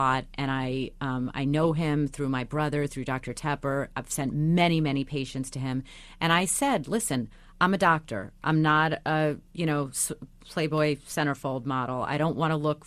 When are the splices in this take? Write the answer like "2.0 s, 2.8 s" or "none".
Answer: none